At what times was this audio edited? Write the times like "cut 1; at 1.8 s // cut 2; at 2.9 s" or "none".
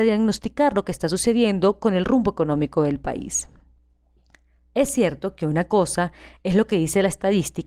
none